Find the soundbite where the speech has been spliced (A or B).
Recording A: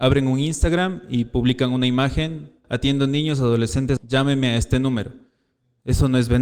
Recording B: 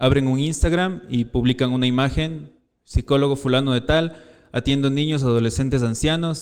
A